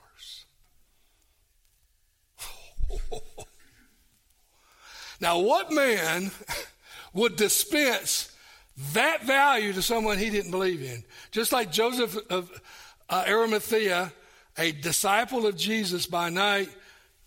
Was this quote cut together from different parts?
no; 0 cuts

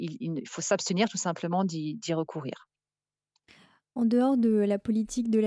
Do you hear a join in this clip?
no; 0 cuts

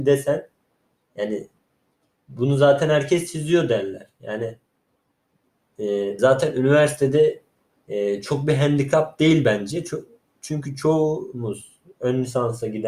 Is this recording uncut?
no; 1 cut; at 6.2 s

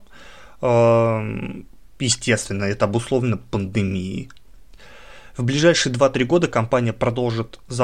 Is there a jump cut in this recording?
no; 0 cuts

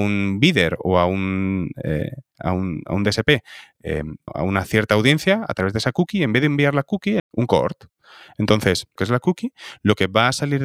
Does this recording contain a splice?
yes; 3 cuts; at 4.3 s, 7.2 s, 9.0 s

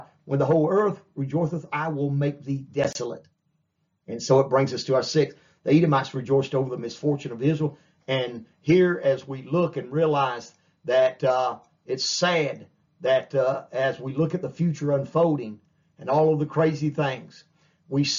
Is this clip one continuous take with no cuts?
yes; 0 cuts

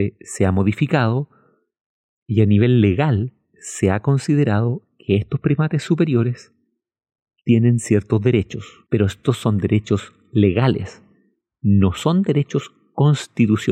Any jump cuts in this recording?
no; 0 cuts

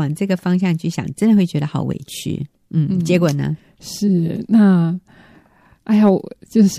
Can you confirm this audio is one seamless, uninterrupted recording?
yes; 0 cuts

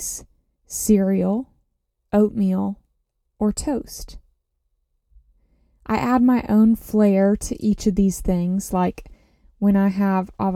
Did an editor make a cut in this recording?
no; 0 cuts

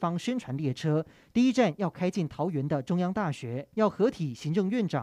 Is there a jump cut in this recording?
no; 0 cuts

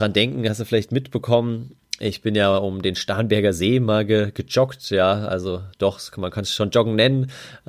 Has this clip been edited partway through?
no; 0 cuts

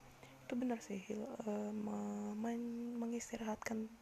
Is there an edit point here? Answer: no; 0 cuts

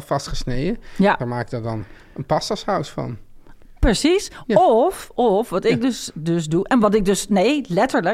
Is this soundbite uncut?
no; 1 cut; at 1.2 s

